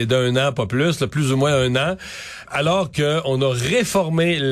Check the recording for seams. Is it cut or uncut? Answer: cut